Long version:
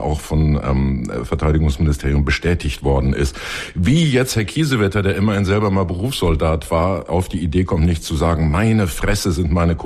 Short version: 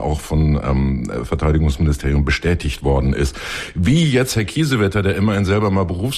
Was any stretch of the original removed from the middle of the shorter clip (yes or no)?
no